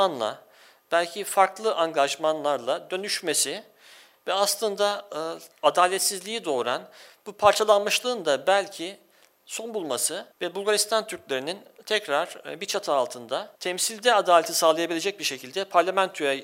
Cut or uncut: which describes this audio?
cut